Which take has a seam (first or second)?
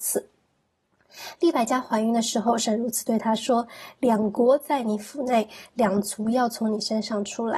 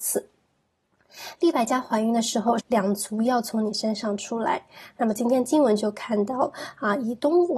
second